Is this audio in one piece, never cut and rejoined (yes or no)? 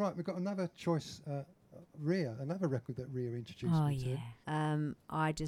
no